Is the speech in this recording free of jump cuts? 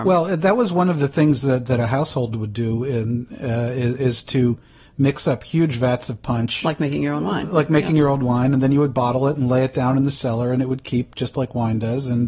yes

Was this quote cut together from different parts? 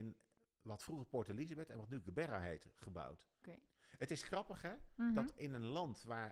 yes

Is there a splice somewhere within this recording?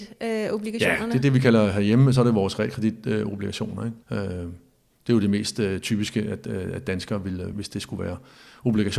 yes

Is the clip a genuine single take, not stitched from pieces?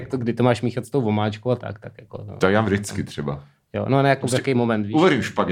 yes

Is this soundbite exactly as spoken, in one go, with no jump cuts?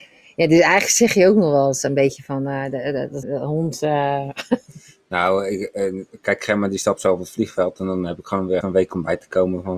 no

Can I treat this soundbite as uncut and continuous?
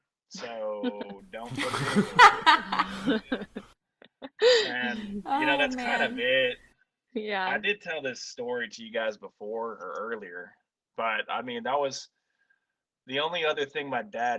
yes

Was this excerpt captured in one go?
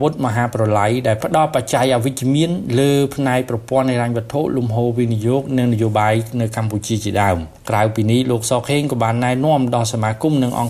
no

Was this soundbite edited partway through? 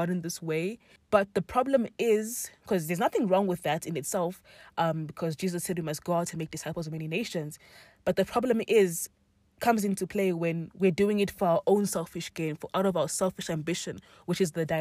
yes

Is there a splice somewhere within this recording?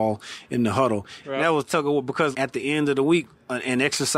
yes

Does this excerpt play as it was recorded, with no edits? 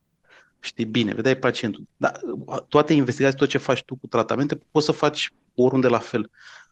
no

